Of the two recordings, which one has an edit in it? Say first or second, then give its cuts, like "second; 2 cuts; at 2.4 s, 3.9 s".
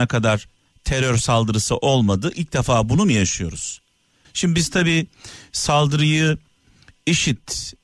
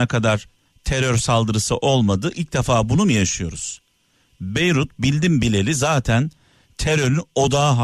first; 1 cut; at 4.2 s